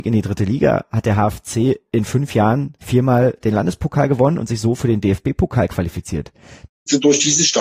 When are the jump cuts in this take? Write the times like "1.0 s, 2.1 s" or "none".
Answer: 6.7 s